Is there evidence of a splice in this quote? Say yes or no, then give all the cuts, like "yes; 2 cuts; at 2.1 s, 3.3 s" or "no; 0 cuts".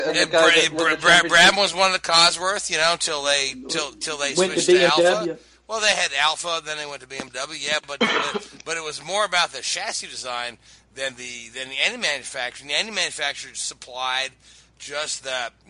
no; 0 cuts